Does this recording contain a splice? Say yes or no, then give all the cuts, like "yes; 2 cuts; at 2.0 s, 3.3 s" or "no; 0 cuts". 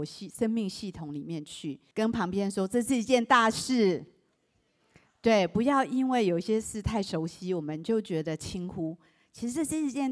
yes; 1 cut; at 1.9 s